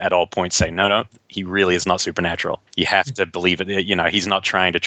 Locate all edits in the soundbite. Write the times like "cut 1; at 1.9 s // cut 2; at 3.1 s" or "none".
cut 1; at 2.7 s